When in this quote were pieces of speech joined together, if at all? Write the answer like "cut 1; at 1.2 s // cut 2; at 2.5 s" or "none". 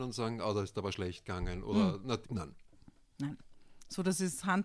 cut 1; at 2.2 s